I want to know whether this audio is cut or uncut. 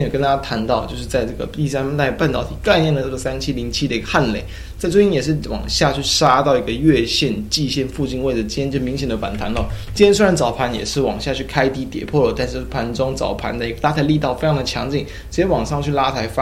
cut